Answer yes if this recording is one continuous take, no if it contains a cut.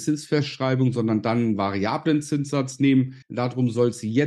no